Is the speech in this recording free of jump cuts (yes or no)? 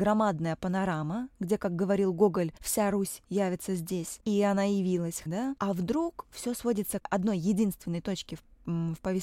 no